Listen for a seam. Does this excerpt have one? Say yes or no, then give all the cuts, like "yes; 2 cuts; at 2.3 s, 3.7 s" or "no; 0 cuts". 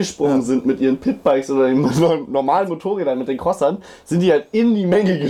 no; 0 cuts